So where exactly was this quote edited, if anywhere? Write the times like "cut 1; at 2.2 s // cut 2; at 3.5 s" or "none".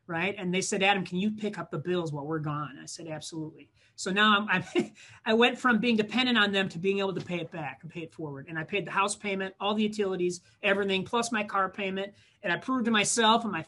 none